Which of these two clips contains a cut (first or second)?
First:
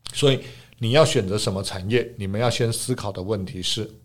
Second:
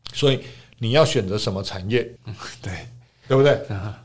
second